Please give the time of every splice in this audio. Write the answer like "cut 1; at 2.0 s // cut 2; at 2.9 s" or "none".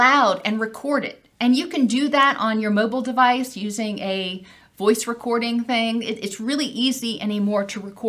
none